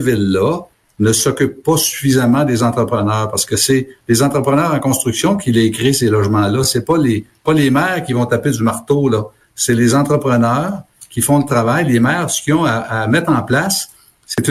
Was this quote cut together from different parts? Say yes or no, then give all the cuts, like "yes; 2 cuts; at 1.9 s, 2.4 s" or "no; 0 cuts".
no; 0 cuts